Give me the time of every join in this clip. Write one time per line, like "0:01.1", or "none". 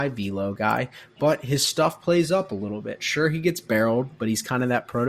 none